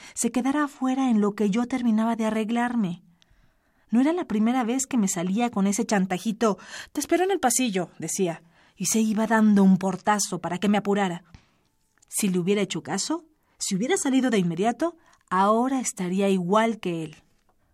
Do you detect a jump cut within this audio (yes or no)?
no